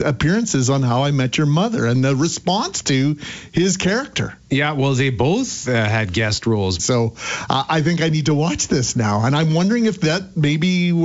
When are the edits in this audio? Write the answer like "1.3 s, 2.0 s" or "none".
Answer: 6.8 s